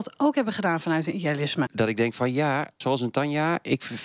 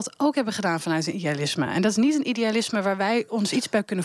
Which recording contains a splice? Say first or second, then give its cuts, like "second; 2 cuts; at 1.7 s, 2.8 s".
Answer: first; 2 cuts; at 1.7 s, 2.8 s